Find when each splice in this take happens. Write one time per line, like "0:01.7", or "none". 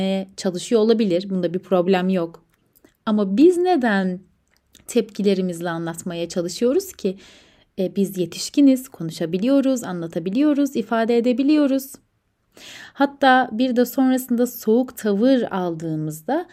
none